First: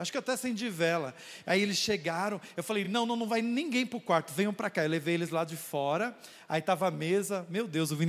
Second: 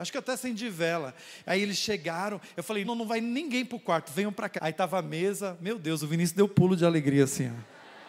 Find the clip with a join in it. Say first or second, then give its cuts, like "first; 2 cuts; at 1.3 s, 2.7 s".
second; 2 cuts; at 2.8 s, 4.6 s